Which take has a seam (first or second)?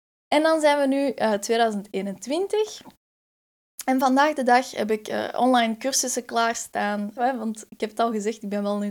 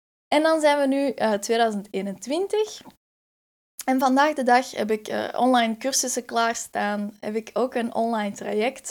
first